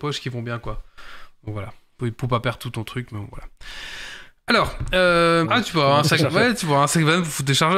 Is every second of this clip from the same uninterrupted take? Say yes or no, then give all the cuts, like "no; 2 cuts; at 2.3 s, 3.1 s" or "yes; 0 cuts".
no; 1 cut; at 5.4 s